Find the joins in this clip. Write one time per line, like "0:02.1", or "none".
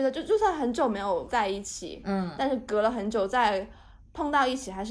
none

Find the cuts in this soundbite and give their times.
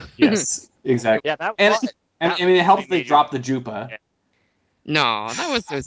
0:01.2

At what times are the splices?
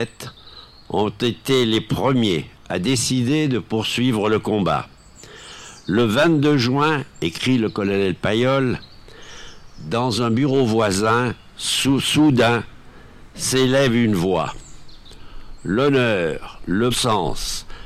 0:16.9

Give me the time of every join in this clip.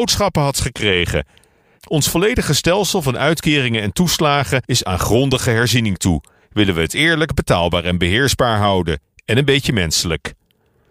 0:01.8

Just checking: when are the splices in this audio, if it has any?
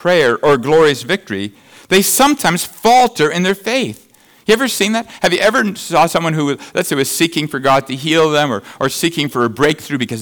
none

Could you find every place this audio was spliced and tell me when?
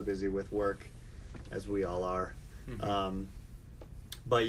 none

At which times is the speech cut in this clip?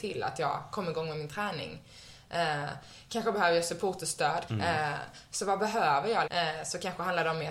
0:04.5
0:06.3

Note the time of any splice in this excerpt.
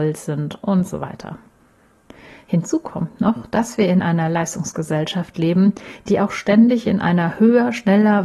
none

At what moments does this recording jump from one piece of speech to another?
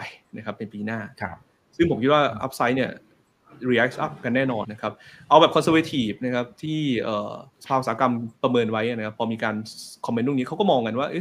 0:04.6
0:07.5

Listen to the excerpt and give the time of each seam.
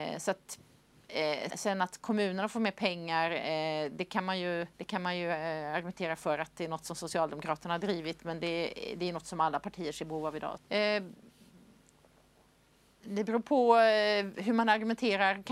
0:01.5
0:04.7
0:10.6

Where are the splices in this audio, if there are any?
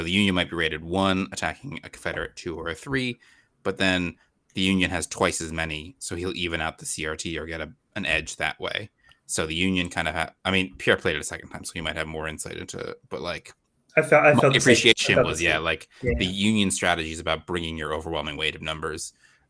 none

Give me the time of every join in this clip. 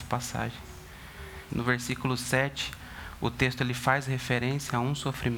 0:01.5

